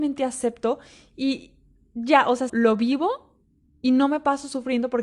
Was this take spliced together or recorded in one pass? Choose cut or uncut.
cut